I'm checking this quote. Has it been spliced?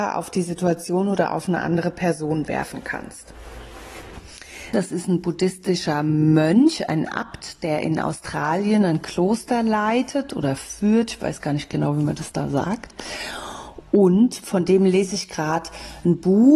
yes; 1 cut; at 4.7 s

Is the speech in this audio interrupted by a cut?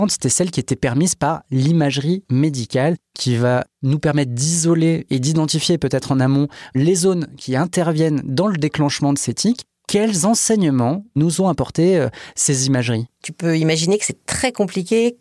yes; 1 cut; at 13.1 s

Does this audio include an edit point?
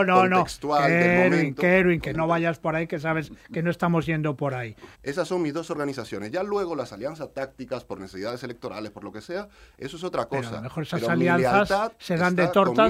yes; 2 cuts; at 2.1 s, 4.9 s

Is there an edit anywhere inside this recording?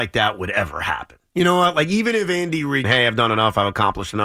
yes; 1 cut; at 2.8 s

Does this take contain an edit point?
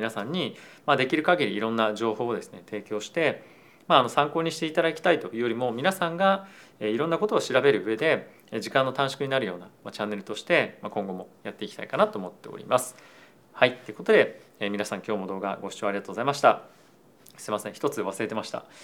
no; 0 cuts

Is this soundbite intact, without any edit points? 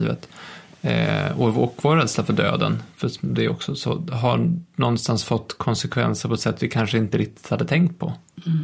yes; 0 cuts

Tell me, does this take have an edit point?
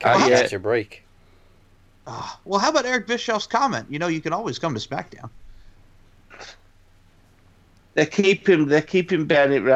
no; 0 cuts

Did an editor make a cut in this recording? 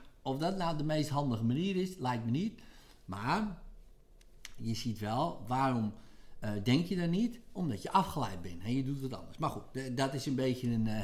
no; 0 cuts

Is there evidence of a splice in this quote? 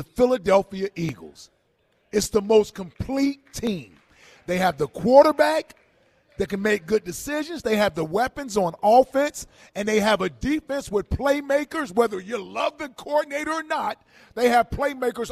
no; 0 cuts

